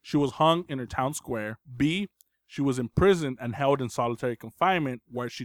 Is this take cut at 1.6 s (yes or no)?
yes